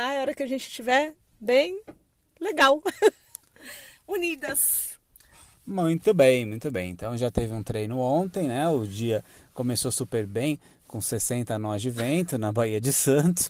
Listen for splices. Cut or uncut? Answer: uncut